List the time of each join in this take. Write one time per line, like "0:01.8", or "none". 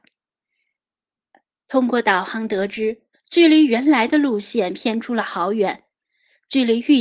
0:03.1